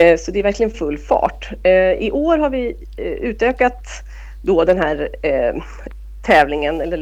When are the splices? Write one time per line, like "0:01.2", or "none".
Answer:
none